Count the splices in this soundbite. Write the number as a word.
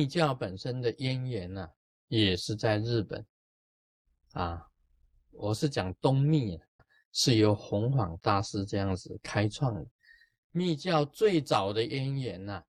one